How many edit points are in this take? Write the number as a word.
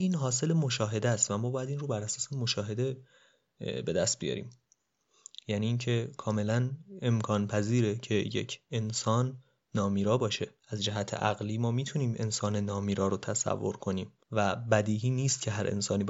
two